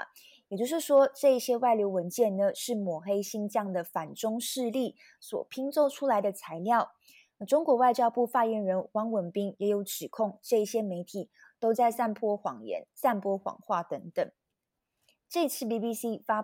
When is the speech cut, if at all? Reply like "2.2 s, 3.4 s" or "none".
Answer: 15.1 s

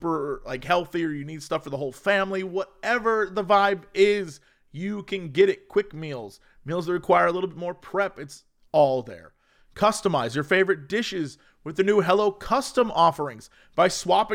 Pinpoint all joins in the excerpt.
none

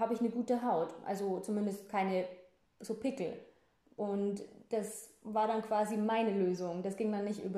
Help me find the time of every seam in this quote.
none

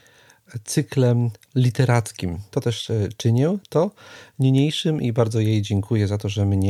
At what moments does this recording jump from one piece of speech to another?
2.5 s

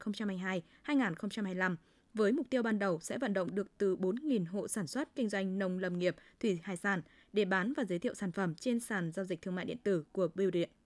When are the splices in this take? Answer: 5.1 s

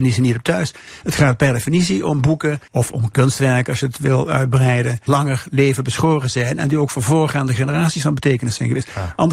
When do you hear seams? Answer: 2.7 s, 5.1 s

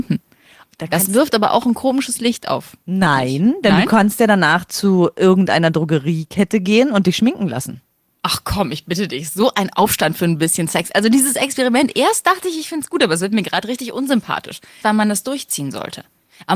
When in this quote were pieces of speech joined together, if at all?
14.8 s

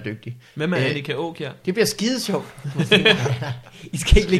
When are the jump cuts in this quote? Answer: 1.6 s

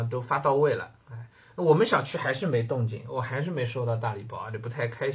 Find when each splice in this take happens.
none

